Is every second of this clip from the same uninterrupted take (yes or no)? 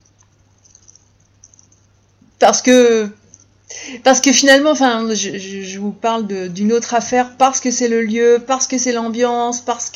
yes